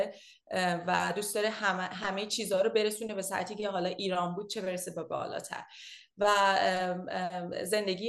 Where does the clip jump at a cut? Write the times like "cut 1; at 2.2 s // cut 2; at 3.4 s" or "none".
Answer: none